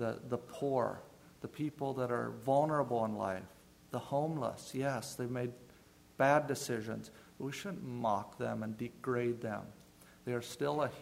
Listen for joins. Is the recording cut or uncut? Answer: uncut